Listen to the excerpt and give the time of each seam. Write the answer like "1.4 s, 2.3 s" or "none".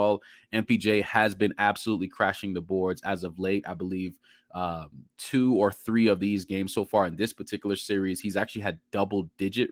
none